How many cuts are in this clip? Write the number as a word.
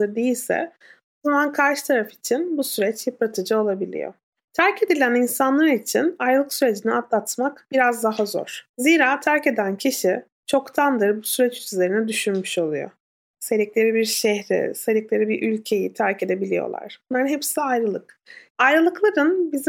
three